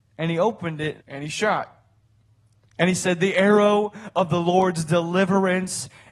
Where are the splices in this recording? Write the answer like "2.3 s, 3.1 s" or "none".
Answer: 1.0 s